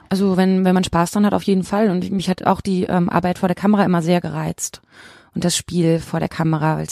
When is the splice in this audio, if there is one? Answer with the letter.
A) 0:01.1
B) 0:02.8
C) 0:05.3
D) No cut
D